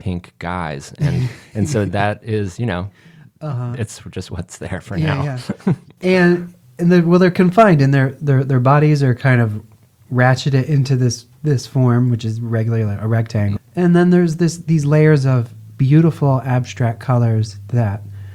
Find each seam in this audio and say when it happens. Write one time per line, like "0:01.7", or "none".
0:13.6